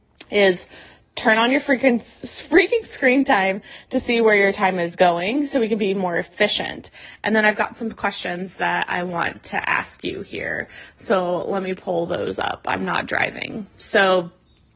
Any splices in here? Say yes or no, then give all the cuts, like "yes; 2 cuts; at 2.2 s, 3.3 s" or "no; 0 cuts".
no; 0 cuts